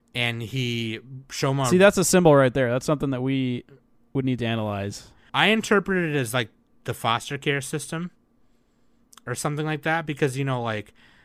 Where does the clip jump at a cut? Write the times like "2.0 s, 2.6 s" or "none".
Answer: 5.3 s